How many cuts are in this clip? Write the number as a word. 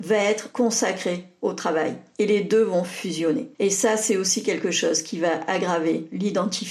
one